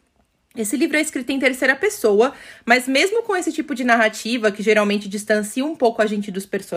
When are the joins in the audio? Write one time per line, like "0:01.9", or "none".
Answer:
none

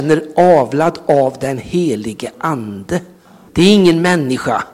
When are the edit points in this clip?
0:03.5

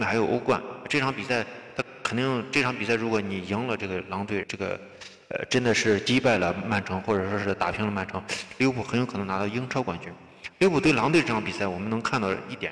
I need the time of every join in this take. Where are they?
0:04.4

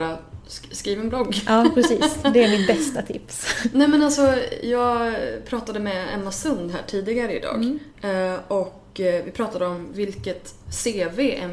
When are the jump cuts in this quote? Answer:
none

